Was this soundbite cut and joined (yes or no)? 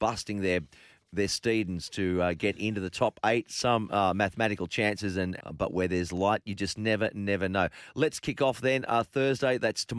yes